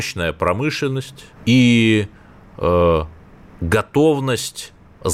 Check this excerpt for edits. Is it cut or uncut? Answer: cut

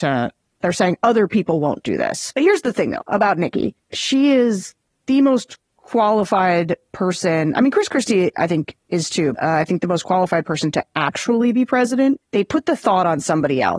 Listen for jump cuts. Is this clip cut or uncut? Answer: cut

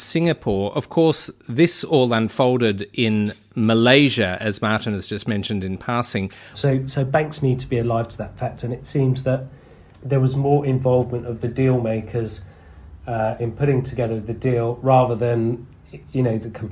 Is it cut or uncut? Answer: cut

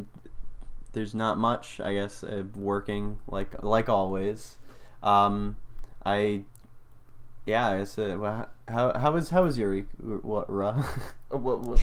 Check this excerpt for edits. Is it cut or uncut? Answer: uncut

